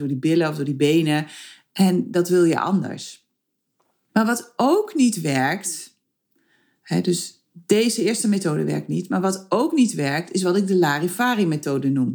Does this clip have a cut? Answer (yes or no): no